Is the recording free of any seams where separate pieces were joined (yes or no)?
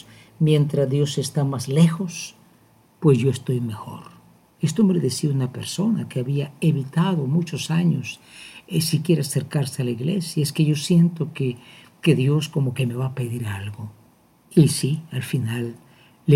yes